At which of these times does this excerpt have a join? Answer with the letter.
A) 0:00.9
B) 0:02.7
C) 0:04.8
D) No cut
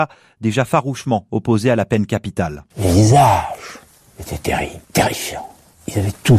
C